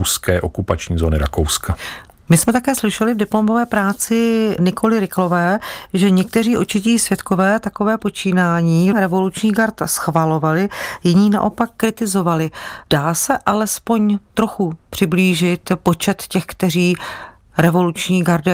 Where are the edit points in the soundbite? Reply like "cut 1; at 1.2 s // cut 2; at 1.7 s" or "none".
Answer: cut 1; at 8.9 s

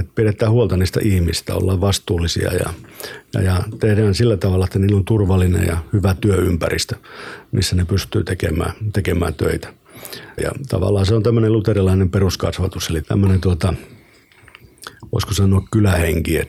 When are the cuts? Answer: cut 1; at 10.4 s // cut 2; at 13.0 s

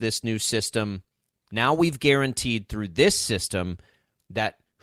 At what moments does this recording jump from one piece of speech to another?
cut 1; at 1.5 s

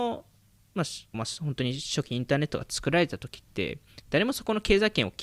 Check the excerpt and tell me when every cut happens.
cut 1; at 1.1 s

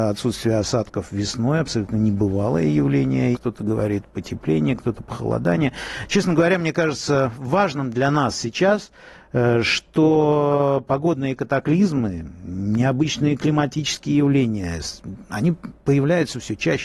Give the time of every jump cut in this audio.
cut 1; at 3.3 s

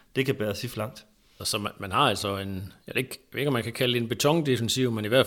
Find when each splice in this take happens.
cut 1; at 1.4 s

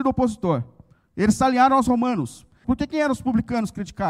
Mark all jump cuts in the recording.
cut 1; at 2.6 s

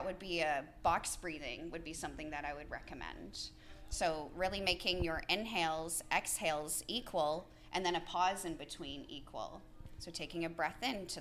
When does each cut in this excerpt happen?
none

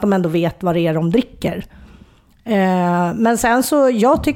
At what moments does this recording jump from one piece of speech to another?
none

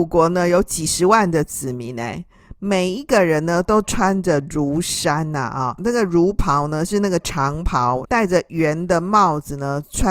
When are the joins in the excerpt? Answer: cut 1; at 5.8 s // cut 2; at 8.1 s

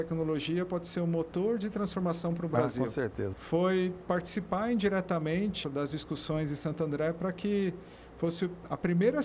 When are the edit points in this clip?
cut 1; at 3.3 s // cut 2; at 5.6 s

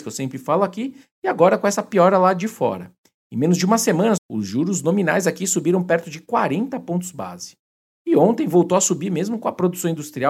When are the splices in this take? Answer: cut 1; at 4.2 s

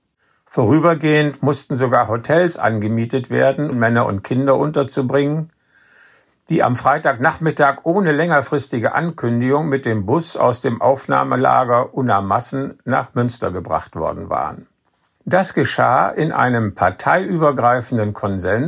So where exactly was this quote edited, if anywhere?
cut 1; at 3.7 s // cut 2; at 15.2 s

